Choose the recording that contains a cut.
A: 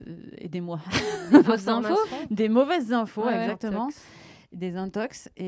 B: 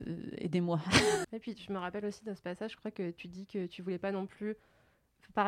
B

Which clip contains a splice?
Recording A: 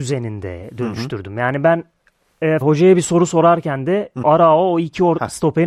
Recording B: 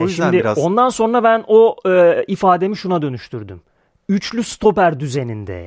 A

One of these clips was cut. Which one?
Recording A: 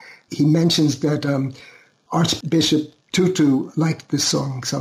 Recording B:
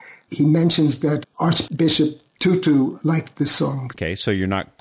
B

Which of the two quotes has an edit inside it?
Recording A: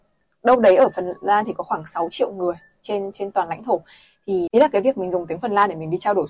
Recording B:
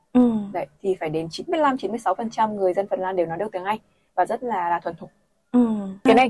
A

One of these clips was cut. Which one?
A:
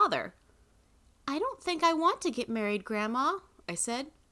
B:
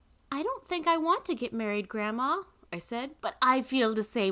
B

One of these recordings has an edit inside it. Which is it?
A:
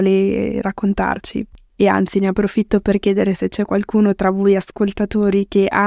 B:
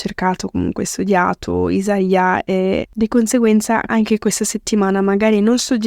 B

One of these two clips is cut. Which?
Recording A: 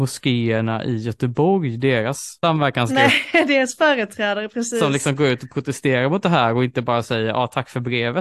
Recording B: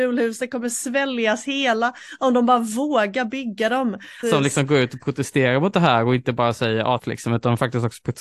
B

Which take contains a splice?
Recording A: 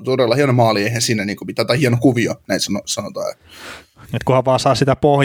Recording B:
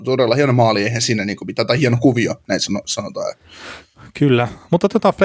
A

